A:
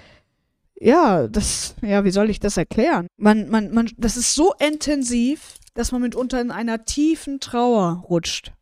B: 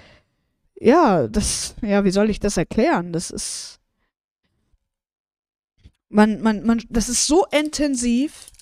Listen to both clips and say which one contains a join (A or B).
A